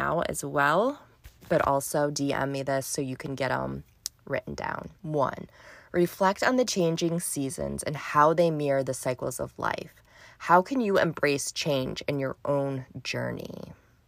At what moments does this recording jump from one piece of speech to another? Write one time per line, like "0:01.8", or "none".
0:05.0